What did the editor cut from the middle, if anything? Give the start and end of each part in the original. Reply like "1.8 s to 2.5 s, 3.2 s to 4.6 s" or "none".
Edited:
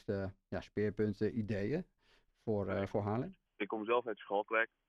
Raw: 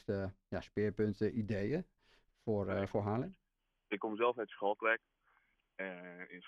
3.5 s to 3.8 s